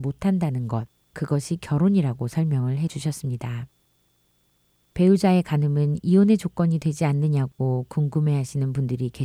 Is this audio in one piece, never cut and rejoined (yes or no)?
yes